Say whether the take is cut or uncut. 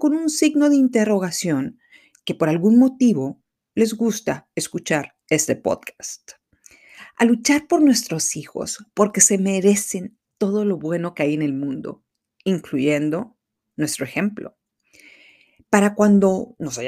uncut